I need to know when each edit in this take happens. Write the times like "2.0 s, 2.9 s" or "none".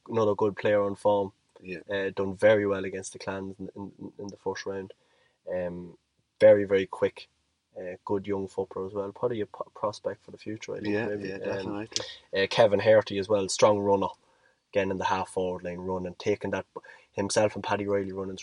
none